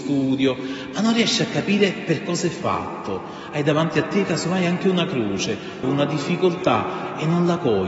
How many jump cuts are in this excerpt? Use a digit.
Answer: 1